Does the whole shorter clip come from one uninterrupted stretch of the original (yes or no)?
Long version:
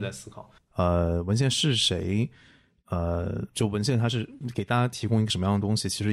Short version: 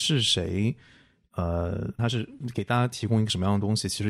no